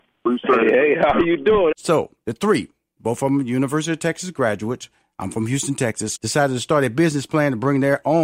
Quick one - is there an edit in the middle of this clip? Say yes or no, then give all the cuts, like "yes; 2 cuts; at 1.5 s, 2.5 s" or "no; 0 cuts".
yes; 2 cuts; at 1.7 s, 6.1 s